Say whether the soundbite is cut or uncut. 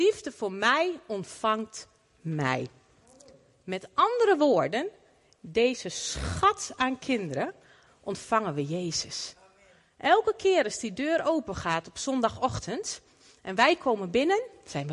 cut